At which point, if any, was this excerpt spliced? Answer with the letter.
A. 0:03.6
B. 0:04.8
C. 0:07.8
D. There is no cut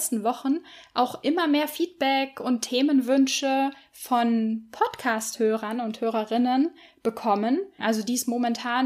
C